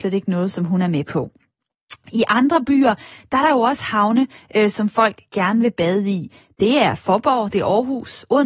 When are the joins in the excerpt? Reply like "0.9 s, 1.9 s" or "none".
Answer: none